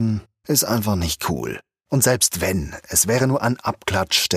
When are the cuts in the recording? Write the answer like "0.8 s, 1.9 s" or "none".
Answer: none